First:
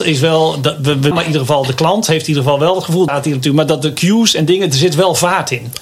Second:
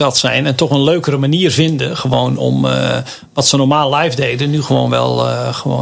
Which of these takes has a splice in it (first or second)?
first